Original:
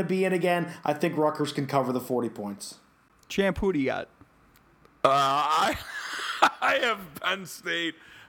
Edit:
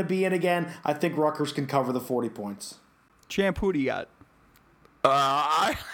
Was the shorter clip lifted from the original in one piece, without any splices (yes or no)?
yes